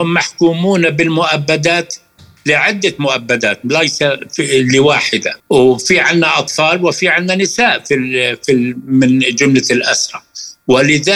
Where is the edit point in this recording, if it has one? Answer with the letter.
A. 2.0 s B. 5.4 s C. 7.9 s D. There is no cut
B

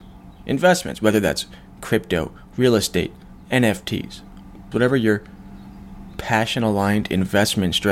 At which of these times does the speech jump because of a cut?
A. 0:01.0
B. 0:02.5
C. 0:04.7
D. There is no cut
C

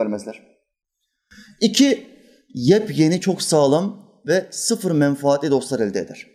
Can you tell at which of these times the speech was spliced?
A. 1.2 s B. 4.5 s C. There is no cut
C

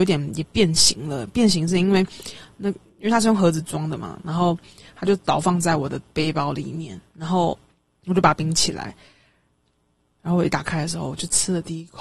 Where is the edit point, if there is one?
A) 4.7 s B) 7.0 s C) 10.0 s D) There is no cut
D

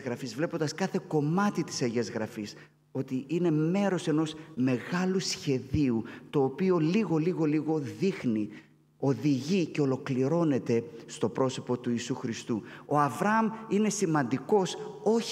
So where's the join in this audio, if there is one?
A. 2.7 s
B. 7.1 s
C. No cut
B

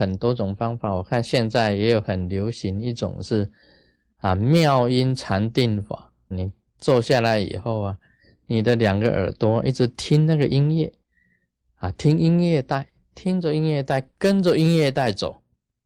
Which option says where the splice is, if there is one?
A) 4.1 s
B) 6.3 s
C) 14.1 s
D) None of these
B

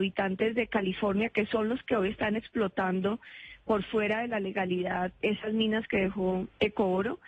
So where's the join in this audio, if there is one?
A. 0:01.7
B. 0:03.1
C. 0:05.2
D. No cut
C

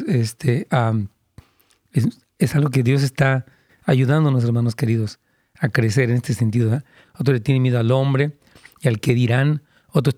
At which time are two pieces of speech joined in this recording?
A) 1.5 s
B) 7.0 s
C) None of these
B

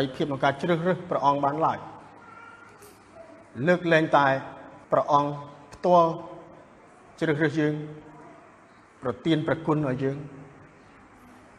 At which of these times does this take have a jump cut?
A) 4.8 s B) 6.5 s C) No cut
A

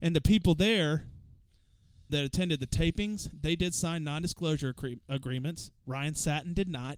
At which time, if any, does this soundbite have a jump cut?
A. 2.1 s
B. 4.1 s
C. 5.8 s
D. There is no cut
A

